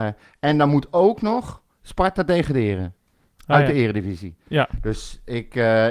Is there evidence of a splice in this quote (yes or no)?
no